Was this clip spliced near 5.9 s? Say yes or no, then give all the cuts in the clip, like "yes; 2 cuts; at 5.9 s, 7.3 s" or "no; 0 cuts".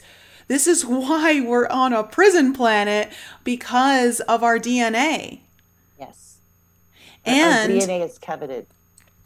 no; 0 cuts